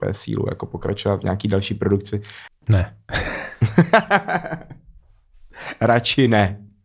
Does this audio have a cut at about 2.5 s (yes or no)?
yes